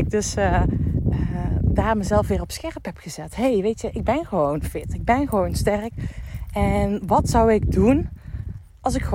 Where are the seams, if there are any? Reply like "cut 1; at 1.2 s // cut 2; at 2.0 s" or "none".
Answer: none